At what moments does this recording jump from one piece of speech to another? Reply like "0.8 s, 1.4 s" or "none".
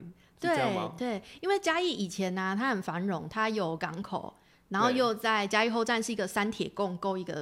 none